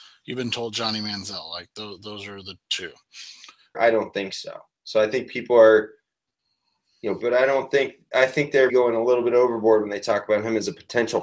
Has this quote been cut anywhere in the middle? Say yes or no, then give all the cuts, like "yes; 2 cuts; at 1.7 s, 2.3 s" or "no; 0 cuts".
yes; 3 cuts; at 3.7 s, 7.2 s, 8.7 s